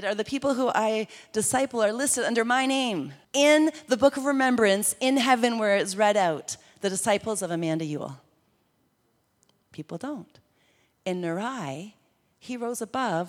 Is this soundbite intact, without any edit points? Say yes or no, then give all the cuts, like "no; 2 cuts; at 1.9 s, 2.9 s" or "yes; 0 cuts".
no; 2 cuts; at 3.2 s, 9.6 s